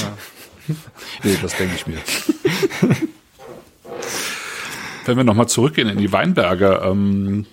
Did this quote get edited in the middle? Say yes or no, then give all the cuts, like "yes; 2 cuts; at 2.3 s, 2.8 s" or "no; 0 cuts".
yes; 1 cut; at 1.2 s